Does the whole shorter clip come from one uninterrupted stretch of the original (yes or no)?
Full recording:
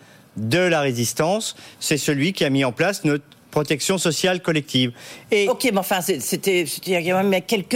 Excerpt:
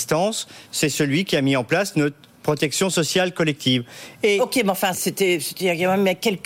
no